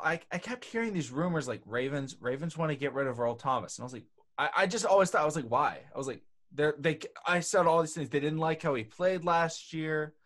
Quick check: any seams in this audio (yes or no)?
no